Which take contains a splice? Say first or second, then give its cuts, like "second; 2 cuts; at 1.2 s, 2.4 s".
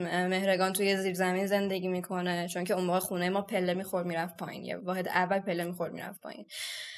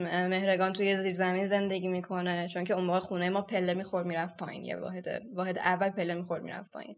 first; 1 cut; at 4.8 s